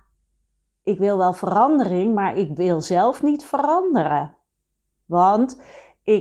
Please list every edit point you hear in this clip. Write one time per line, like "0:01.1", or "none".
none